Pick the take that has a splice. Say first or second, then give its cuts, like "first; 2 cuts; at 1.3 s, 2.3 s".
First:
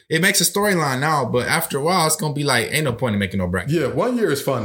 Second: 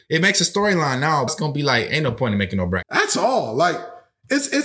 second; 2 cuts; at 1.3 s, 2.8 s